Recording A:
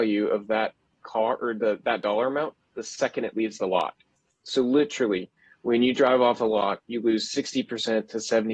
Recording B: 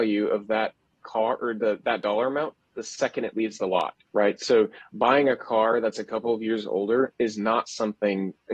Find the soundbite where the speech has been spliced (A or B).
B